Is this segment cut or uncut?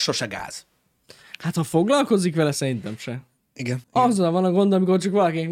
cut